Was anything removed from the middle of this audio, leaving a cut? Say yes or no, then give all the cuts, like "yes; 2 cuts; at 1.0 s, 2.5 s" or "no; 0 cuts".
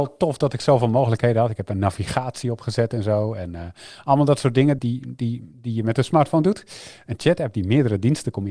yes; 2 cuts; at 4.8 s, 7.1 s